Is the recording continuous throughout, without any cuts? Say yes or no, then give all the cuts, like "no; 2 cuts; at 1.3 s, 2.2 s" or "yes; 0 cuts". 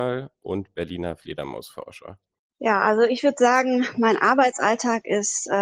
no; 1 cut; at 2.4 s